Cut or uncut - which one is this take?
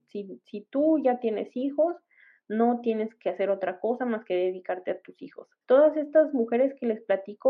cut